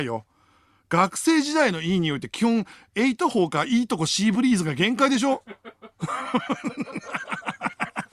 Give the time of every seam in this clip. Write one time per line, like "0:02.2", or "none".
none